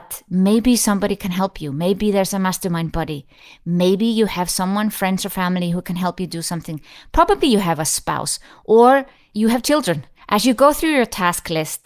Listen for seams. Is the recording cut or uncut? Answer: cut